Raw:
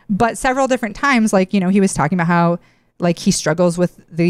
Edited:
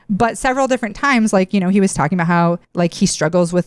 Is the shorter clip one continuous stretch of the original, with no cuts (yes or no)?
no